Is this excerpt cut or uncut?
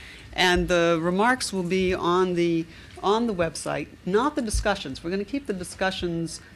uncut